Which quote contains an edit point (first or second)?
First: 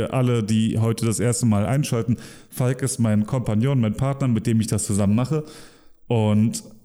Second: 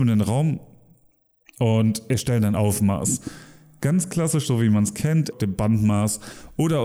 second